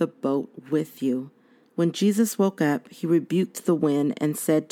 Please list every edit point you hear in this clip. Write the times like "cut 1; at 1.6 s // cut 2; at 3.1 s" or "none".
cut 1; at 1.6 s